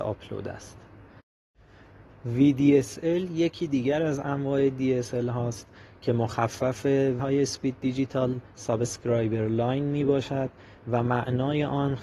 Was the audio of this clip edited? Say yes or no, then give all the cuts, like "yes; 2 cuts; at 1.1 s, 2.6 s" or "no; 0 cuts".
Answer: yes; 1 cut; at 7.2 s